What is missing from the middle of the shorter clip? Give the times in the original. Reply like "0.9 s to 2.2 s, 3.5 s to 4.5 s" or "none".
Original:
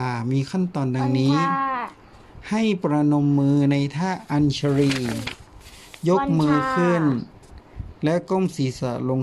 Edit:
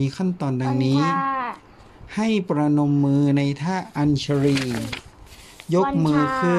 none